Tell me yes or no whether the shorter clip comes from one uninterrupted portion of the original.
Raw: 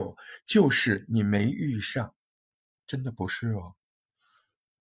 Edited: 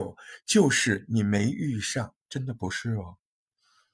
no